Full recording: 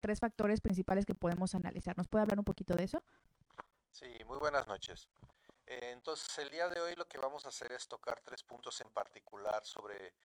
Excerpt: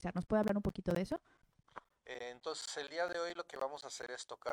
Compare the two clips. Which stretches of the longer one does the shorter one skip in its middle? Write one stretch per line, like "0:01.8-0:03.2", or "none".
0:03.8-0:05.6